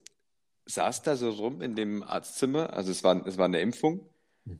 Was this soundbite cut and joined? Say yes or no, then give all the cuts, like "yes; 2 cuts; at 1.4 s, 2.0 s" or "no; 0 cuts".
no; 0 cuts